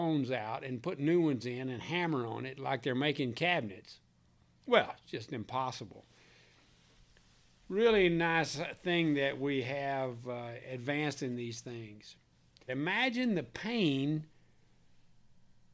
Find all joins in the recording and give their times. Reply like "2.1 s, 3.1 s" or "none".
12.7 s

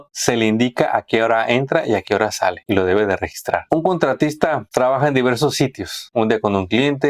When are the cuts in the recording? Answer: none

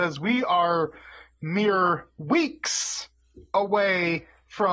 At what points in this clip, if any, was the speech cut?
none

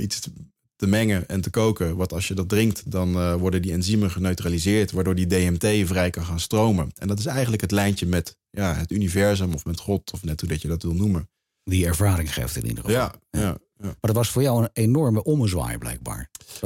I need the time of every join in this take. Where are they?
none

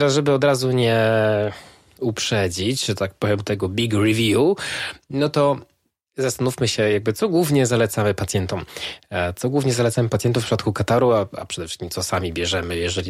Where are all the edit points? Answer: none

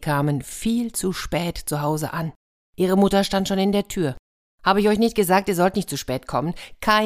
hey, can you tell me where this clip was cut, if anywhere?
none

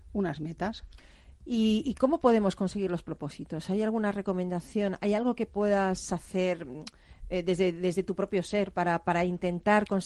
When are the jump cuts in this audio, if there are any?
none

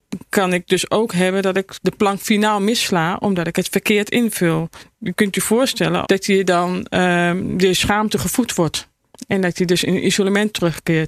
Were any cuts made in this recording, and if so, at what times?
6.0 s

